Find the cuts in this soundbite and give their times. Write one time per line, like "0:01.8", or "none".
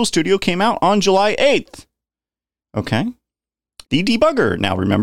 0:03.8